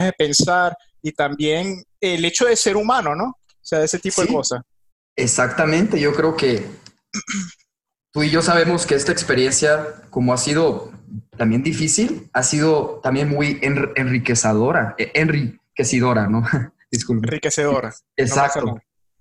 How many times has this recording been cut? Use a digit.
0